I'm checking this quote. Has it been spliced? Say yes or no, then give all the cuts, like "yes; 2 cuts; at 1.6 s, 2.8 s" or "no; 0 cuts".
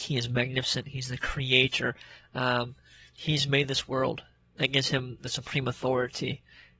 no; 0 cuts